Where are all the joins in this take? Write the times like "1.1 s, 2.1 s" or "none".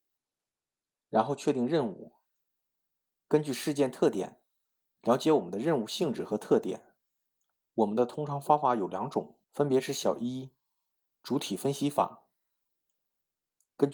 7.7 s, 9.4 s